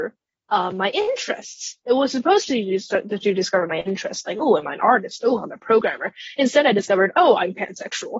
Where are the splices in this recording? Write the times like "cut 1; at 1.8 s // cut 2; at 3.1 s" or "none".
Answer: none

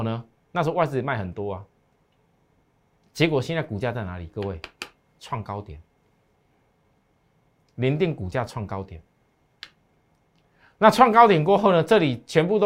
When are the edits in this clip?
none

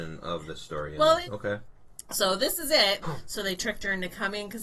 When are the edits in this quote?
cut 1; at 1.2 s // cut 2; at 3.0 s

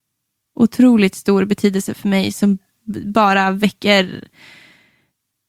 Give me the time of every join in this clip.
none

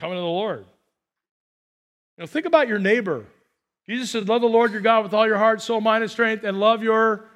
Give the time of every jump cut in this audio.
none

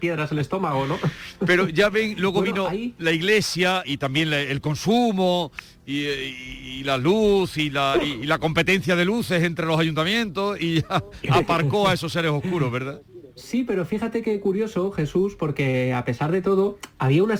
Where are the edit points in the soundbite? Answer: cut 1; at 3.8 s

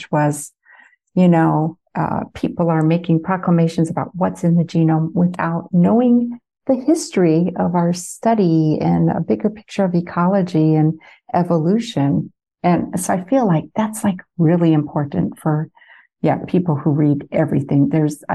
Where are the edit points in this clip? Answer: none

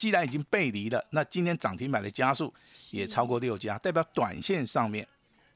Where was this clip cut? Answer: none

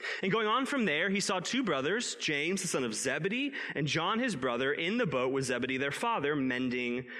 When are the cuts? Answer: none

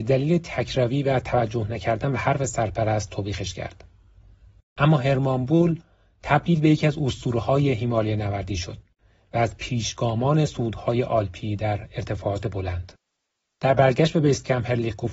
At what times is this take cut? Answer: cut 1; at 13.4 s

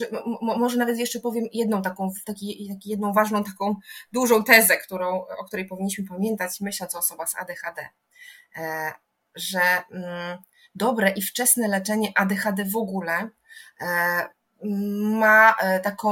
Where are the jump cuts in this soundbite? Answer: none

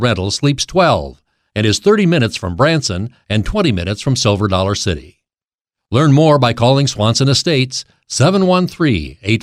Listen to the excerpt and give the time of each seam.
none

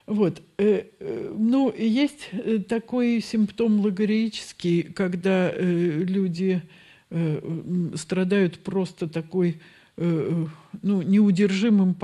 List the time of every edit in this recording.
none

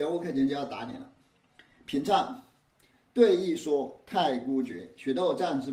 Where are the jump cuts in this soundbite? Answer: none

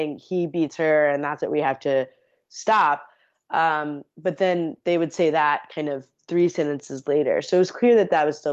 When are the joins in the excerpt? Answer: none

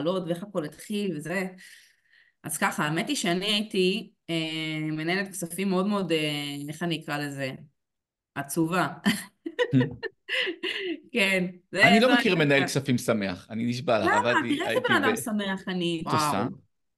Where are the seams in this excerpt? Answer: cut 1; at 16.1 s

